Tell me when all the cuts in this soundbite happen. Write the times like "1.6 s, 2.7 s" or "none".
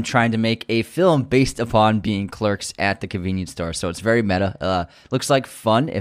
none